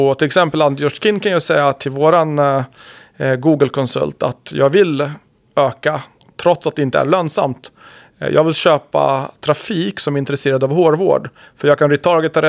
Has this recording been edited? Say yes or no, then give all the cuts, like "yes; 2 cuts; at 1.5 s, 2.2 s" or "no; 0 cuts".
no; 0 cuts